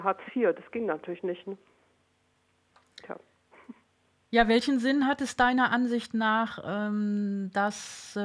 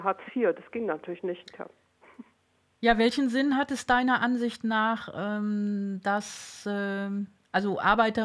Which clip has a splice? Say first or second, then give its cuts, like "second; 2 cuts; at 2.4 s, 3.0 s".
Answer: second; 1 cut; at 1.4 s